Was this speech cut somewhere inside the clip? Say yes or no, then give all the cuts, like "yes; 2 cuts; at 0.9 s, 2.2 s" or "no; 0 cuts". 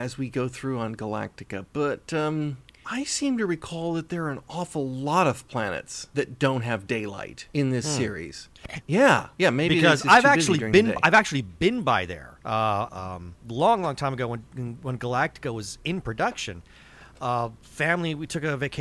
yes; 2 cuts; at 8.8 s, 12.9 s